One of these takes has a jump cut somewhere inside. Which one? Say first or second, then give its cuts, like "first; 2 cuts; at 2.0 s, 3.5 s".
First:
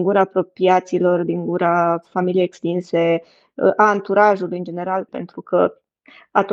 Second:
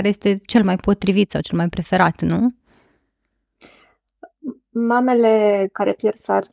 first; 1 cut; at 5.1 s